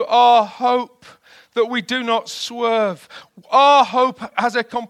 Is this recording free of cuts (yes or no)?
yes